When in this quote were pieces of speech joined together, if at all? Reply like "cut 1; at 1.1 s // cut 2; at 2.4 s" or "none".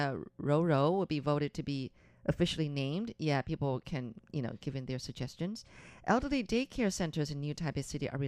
none